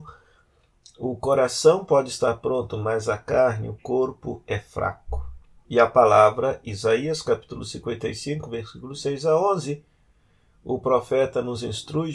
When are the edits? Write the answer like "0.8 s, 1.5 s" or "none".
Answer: 5.7 s